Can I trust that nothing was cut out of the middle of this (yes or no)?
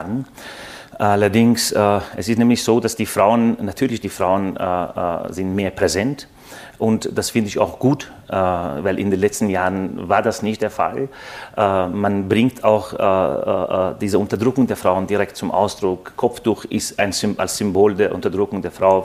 yes